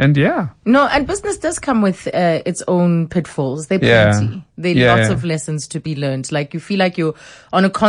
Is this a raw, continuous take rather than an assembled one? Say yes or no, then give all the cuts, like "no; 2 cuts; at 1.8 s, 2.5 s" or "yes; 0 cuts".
yes; 0 cuts